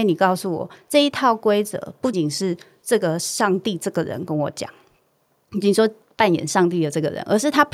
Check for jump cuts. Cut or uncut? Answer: cut